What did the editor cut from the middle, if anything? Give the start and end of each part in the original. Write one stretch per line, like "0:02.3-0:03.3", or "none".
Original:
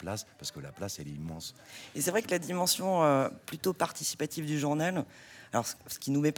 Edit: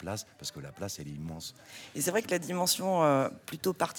none